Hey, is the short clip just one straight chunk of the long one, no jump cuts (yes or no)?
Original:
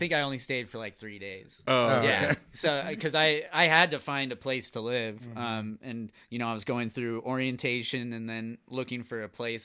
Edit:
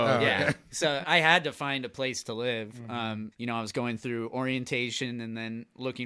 no